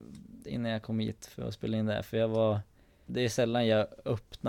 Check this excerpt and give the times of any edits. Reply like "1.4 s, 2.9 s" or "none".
3.1 s